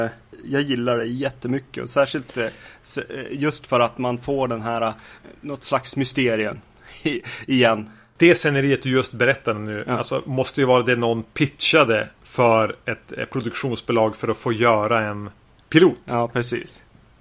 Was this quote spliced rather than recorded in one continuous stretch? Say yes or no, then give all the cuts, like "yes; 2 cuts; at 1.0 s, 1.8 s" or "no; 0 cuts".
no; 0 cuts